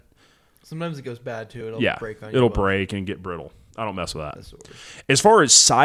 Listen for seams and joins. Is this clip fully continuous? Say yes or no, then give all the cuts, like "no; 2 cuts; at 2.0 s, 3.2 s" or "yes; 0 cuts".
yes; 0 cuts